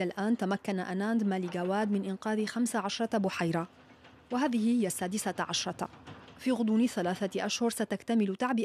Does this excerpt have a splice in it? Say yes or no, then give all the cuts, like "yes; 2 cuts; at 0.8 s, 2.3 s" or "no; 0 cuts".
no; 0 cuts